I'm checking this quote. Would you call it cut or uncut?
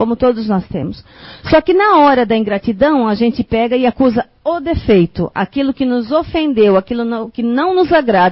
uncut